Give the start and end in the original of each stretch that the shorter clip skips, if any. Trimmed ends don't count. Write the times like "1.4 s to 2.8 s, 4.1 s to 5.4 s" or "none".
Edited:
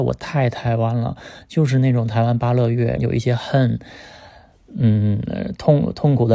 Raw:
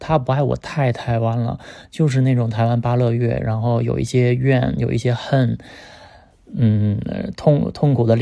3.4 s to 4.8 s